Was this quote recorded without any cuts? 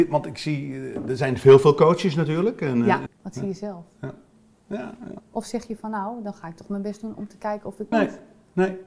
no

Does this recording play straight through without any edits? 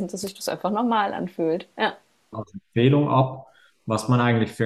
no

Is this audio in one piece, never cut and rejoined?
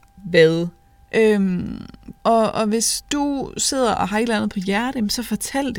no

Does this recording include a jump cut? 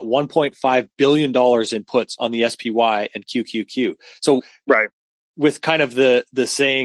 no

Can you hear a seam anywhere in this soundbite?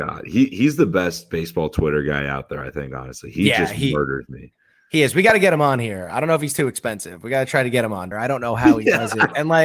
yes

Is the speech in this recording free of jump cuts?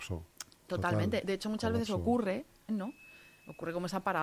no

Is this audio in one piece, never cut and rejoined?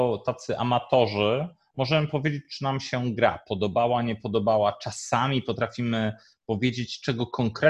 yes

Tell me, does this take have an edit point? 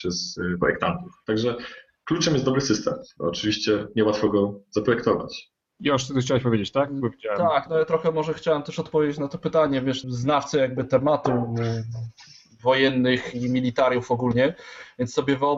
yes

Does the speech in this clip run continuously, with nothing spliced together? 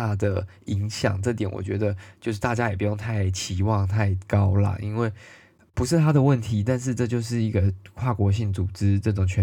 yes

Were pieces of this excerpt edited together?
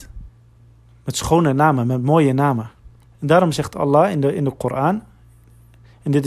yes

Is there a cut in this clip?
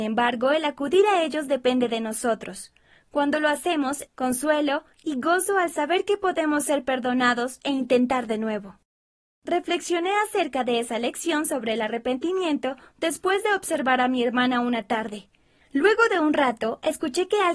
yes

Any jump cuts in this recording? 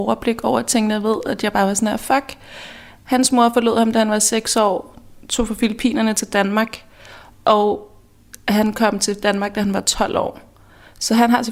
no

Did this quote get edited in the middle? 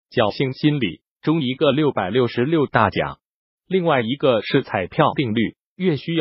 no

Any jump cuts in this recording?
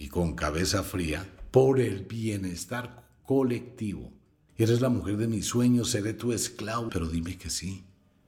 yes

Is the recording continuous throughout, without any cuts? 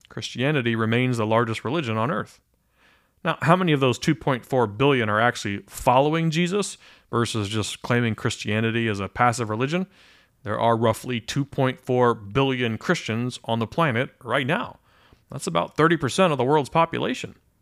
no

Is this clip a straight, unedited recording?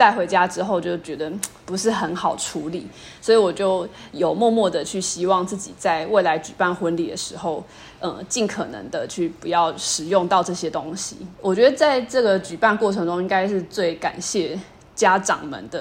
yes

